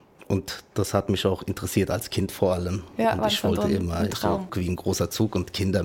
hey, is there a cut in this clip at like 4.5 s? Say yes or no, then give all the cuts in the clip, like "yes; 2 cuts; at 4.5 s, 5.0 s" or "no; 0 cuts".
yes; 1 cut; at 4.5 s